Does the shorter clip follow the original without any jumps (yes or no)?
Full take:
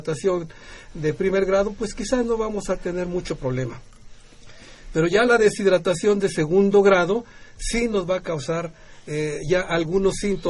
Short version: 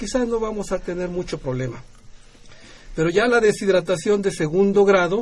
yes